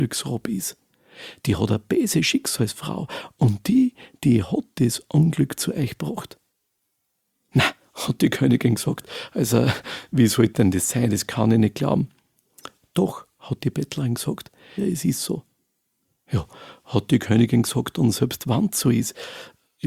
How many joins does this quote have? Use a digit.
1